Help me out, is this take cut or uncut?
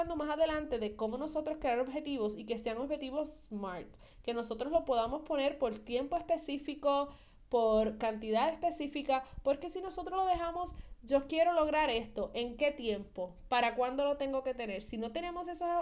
uncut